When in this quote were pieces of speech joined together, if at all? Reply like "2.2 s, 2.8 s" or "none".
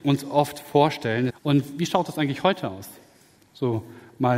1.3 s